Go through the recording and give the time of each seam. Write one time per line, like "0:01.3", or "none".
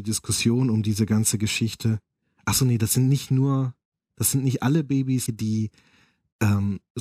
0:05.3

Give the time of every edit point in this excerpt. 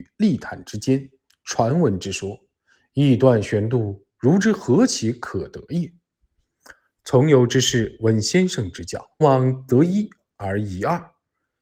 0:09.2

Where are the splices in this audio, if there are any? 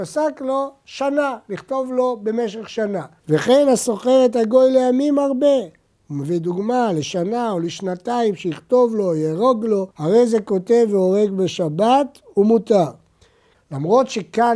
0:03.2
0:09.9
0:13.5

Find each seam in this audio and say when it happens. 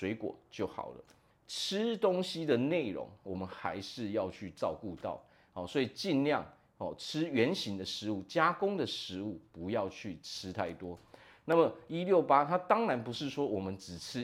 0:01.3

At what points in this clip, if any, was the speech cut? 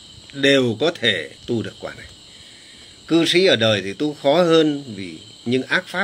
0:01.4

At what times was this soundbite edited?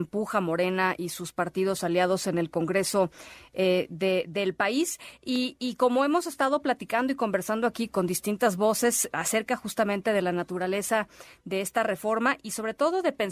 0:07.9
0:09.1

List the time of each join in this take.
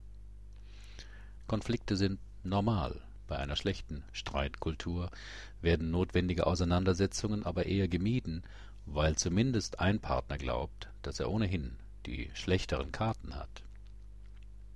0:01.4

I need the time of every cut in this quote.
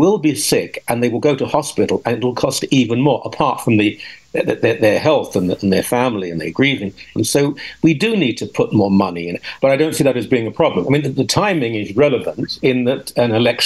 0:07.2
0:09.6

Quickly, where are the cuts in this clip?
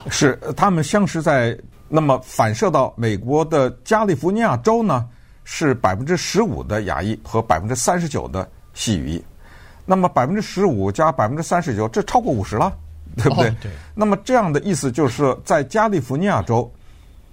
0:01.7

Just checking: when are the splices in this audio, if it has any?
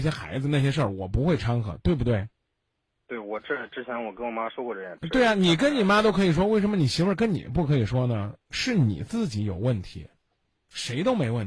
none

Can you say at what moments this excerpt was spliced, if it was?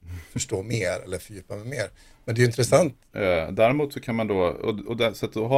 0:01.0
0:03.1

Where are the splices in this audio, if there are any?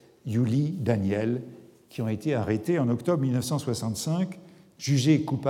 none

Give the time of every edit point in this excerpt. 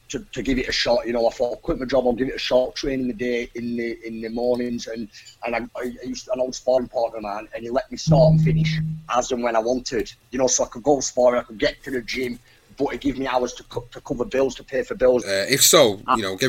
0:15.2

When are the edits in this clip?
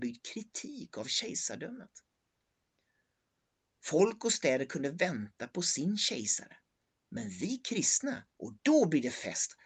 0:08.3

